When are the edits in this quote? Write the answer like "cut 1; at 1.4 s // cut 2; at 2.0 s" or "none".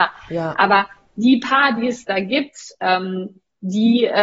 none